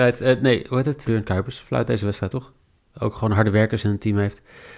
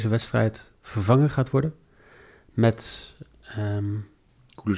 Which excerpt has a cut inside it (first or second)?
first